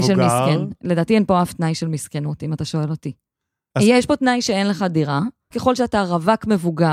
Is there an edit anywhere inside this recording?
yes; 2 cuts; at 3.7 s, 5.5 s

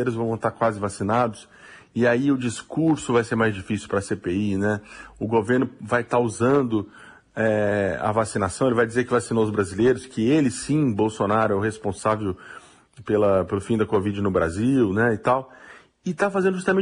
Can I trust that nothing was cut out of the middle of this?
no; 1 cut; at 13.0 s

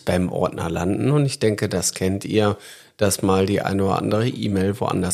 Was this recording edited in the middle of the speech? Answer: no; 0 cuts

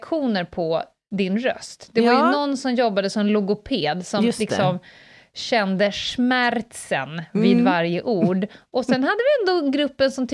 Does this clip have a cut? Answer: no; 0 cuts

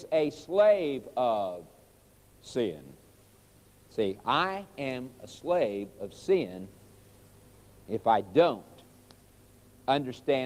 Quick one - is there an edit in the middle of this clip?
no; 0 cuts

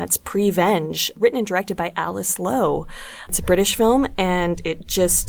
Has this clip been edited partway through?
no; 0 cuts

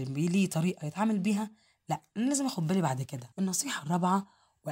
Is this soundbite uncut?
no; 1 cut; at 3.3 s

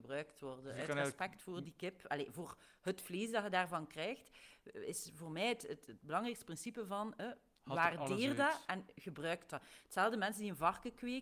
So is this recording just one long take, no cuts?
yes; 0 cuts

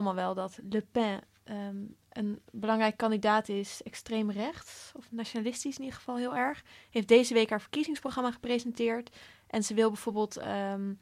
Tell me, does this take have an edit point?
no; 0 cuts

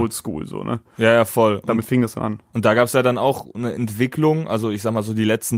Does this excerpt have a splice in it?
no; 0 cuts

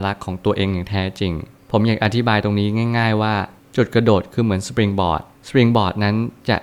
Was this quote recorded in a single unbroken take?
yes; 0 cuts

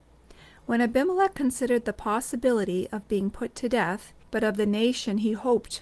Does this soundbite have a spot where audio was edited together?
yes; 1 cut; at 4.2 s

